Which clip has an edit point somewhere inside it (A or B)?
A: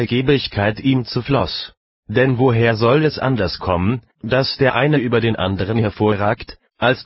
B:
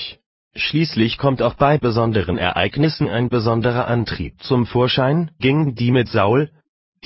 B